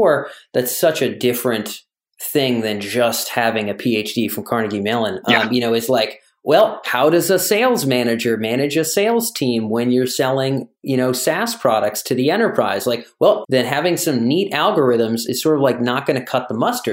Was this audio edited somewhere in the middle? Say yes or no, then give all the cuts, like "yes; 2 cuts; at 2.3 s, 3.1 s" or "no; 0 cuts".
yes; 2 cuts; at 13.4 s, 15.3 s